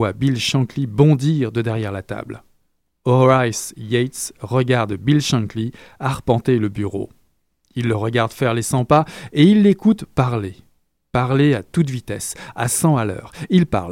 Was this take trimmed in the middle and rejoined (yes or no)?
no